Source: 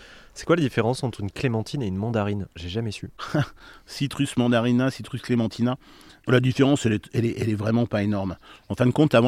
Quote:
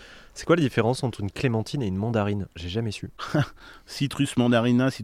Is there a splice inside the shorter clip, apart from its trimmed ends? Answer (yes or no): no